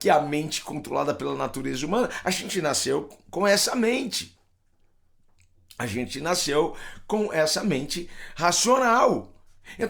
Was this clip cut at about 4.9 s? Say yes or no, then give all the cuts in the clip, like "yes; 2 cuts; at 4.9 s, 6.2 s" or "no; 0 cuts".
no; 0 cuts